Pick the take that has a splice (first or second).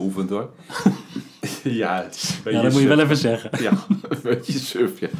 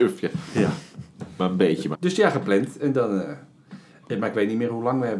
second